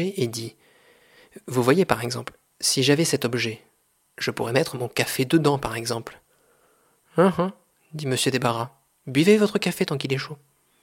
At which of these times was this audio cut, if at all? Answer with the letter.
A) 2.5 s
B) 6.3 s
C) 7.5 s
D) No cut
D